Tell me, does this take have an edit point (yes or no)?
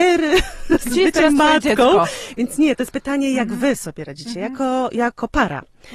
no